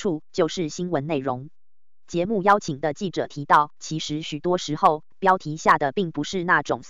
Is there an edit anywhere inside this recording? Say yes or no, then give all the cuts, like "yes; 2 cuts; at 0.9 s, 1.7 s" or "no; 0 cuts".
yes; 1 cut; at 5.1 s